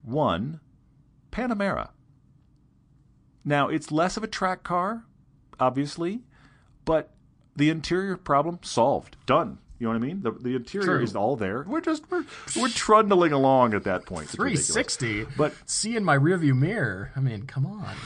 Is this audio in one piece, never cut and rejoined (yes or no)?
no